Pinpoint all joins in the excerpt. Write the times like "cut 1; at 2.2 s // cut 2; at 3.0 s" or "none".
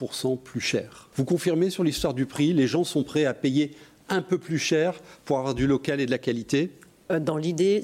cut 1; at 1.1 s